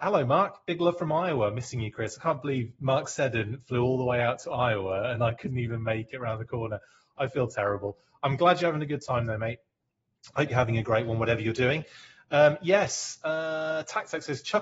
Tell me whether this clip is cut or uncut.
cut